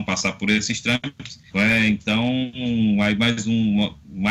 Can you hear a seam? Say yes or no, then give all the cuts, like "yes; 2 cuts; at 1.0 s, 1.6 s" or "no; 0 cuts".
yes; 1 cut; at 1.5 s